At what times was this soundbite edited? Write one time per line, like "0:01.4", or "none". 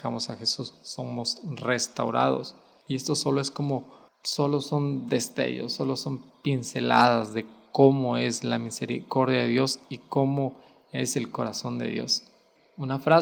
0:02.8